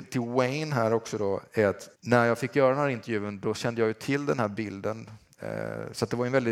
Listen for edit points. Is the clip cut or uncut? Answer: cut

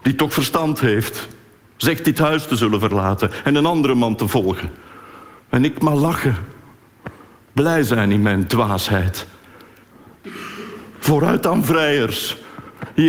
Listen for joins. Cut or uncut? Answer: uncut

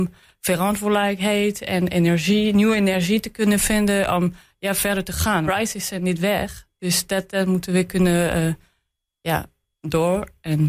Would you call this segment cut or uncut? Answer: cut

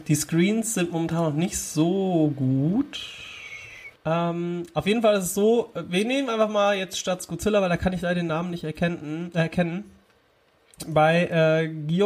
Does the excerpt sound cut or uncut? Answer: cut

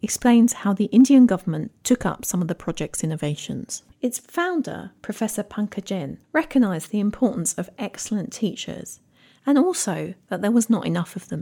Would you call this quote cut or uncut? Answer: cut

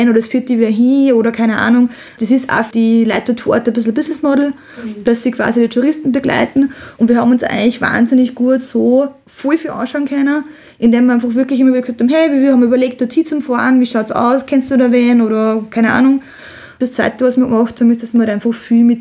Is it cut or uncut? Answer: uncut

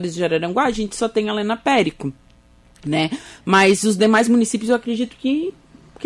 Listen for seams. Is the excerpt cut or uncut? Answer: uncut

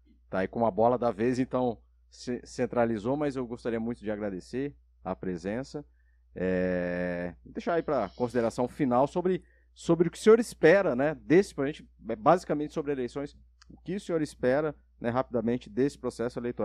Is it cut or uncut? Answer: uncut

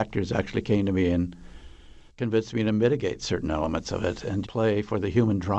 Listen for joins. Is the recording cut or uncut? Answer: cut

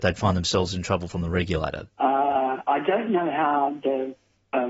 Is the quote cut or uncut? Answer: cut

